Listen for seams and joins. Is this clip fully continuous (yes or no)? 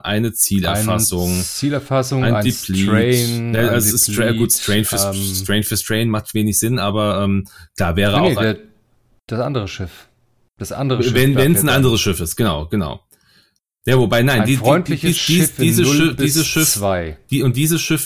yes